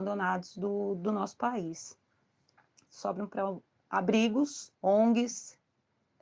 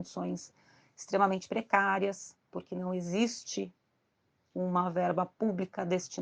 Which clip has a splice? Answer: first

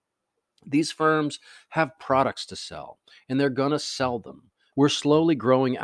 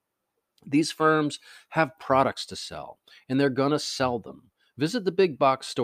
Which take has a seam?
first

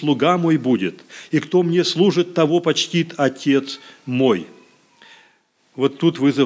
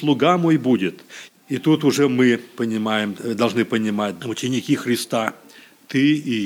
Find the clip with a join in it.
second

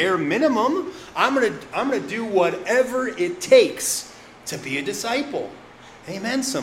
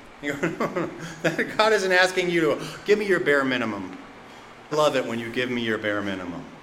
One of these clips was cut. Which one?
second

